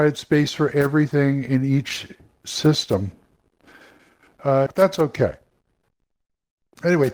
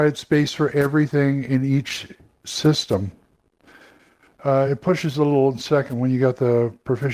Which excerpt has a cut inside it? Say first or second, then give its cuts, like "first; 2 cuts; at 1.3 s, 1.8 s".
first; 1 cut; at 4.7 s